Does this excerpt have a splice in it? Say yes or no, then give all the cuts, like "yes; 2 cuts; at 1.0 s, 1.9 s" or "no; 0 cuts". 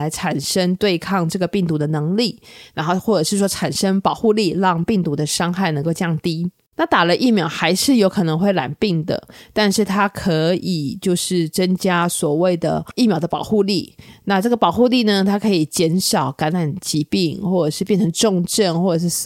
no; 0 cuts